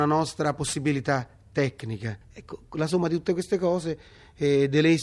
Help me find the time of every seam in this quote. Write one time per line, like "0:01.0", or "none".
0:02.2